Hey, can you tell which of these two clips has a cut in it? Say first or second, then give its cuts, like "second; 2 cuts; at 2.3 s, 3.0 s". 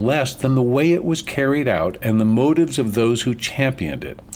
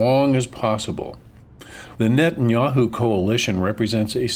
second; 1 cut; at 1.9 s